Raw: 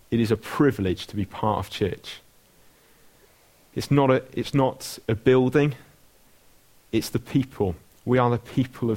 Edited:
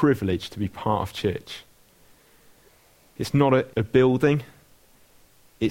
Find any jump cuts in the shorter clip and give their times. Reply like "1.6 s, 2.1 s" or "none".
3.7 s